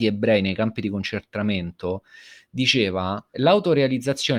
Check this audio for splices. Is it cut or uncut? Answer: cut